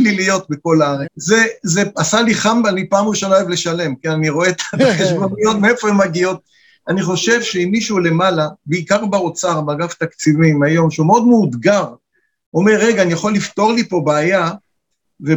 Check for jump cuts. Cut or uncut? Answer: cut